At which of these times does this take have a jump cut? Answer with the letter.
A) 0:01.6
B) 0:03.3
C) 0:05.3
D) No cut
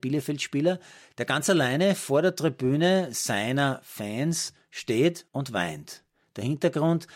C